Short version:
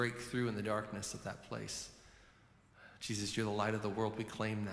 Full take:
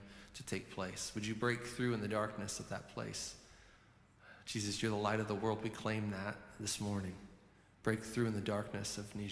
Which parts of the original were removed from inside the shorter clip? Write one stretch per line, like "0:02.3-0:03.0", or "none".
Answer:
none